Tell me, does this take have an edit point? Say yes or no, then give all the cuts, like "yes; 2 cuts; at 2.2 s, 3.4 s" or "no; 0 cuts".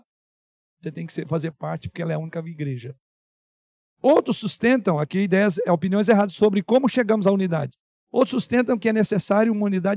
no; 0 cuts